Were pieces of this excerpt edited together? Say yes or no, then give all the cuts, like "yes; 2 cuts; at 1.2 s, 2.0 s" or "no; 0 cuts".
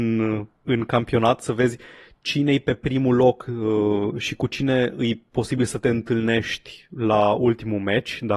no; 0 cuts